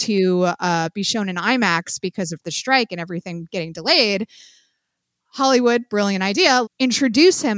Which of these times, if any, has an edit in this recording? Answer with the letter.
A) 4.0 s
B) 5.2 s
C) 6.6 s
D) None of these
C